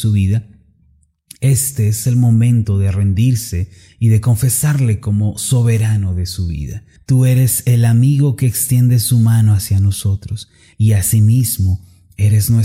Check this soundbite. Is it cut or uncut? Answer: cut